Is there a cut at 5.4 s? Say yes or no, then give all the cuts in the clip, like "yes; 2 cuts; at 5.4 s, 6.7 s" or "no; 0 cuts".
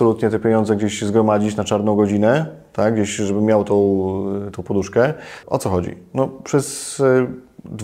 yes; 1 cut; at 5.4 s